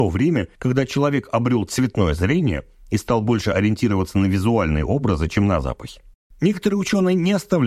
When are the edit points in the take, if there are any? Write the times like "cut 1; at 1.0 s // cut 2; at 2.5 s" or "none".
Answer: none